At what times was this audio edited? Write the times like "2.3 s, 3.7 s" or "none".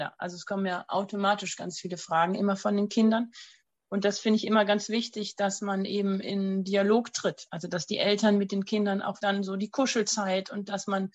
9.2 s